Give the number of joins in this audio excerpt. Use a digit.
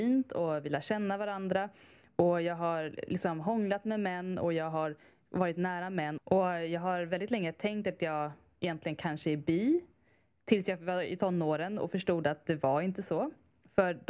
1